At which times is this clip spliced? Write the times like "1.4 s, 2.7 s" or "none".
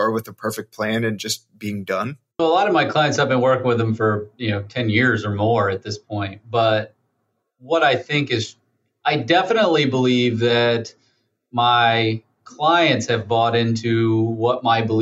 2.4 s

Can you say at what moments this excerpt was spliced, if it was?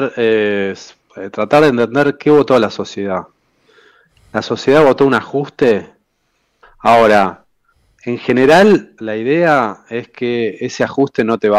6.6 s, 9.0 s

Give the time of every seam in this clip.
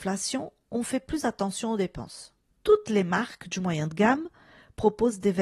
2.5 s

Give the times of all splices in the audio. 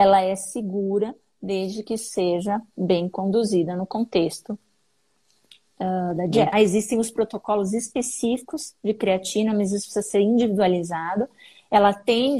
6.5 s

